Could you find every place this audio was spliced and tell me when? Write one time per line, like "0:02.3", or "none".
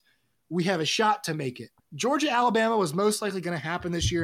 0:01.8